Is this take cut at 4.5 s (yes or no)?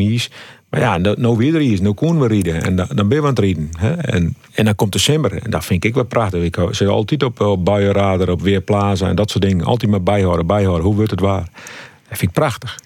yes